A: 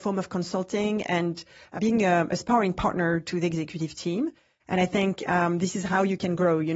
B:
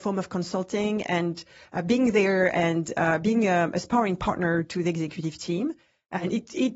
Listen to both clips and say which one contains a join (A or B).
A